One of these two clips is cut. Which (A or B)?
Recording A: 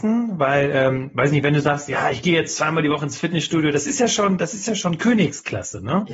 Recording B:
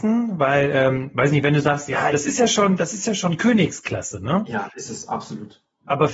B